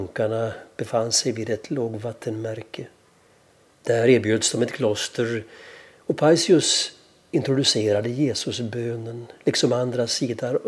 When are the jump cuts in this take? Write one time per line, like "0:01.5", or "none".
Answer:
0:03.7